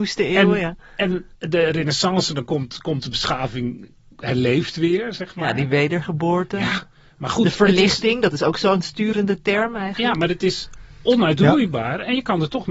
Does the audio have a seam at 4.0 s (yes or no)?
no